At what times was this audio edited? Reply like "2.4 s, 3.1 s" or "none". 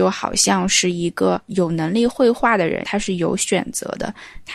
2.8 s